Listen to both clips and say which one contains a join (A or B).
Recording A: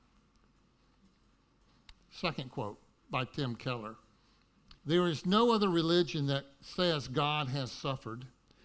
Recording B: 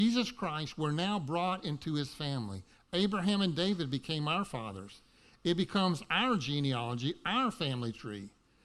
A